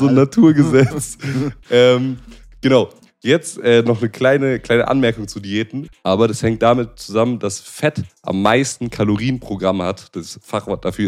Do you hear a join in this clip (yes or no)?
yes